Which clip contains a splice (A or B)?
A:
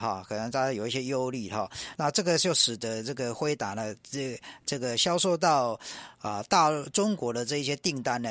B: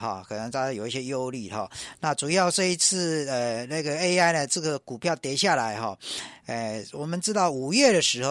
A